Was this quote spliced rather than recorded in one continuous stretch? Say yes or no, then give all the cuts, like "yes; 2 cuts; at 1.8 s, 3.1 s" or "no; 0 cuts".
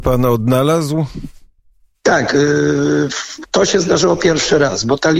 no; 0 cuts